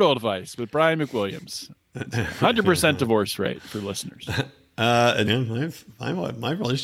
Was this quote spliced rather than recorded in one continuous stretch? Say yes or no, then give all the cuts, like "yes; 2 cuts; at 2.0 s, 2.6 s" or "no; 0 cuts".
yes; 1 cut; at 5.2 s